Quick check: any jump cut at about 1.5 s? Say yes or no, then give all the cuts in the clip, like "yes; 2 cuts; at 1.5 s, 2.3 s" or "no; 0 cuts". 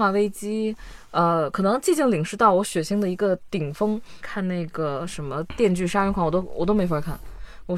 no; 1 cut; at 4.2 s